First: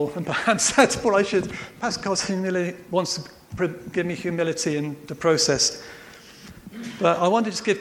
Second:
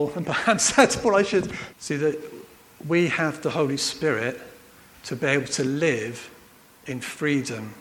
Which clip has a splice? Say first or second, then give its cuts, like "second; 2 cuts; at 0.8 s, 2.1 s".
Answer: second; 1 cut; at 1.7 s